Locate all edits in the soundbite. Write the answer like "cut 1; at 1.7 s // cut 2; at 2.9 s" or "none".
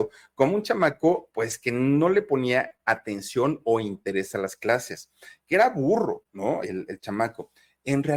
none